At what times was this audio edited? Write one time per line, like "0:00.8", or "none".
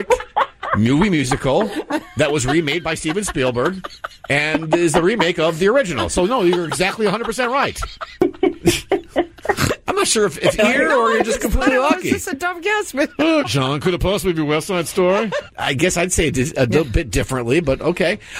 0:10.6
0:13.4
0:15.5